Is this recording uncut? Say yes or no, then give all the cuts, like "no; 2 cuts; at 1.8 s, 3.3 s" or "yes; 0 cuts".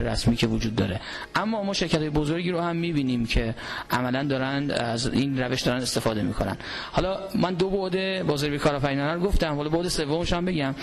yes; 0 cuts